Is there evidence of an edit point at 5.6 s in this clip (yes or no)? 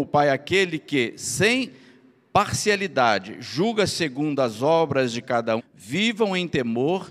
yes